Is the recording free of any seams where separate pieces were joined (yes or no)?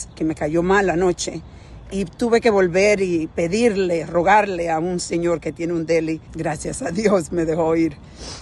no